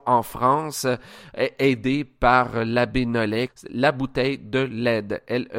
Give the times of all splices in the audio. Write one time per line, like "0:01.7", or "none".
0:03.5